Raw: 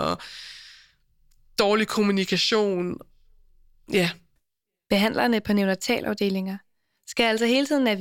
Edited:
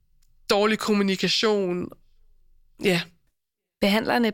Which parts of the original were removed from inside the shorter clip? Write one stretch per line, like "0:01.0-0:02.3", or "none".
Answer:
none